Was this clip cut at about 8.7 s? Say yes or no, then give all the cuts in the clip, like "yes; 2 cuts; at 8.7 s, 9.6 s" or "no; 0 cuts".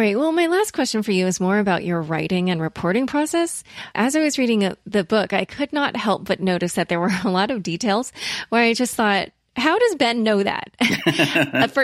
no; 1 cut; at 3.9 s